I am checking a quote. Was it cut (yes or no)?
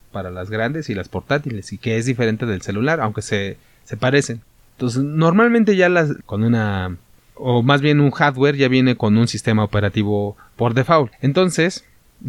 yes